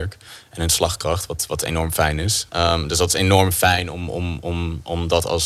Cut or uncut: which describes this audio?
cut